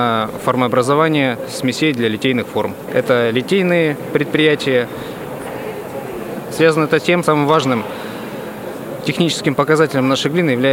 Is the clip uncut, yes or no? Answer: no